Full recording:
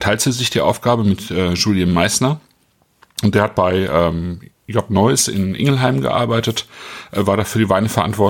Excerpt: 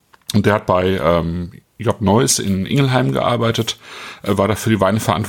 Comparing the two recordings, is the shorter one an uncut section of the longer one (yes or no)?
yes